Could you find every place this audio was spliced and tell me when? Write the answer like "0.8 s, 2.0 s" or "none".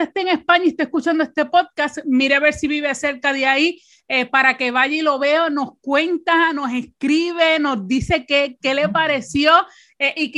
none